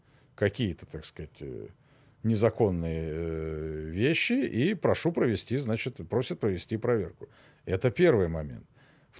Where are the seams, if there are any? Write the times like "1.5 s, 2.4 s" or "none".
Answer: none